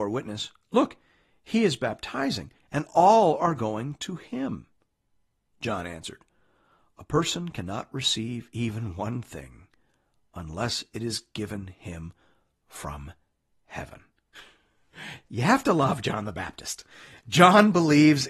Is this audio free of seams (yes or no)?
yes